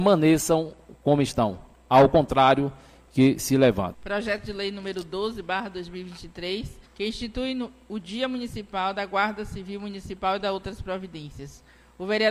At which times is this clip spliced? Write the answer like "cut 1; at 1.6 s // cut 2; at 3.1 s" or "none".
cut 1; at 3.9 s // cut 2; at 6.9 s